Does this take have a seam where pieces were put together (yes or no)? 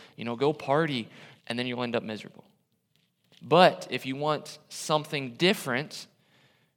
yes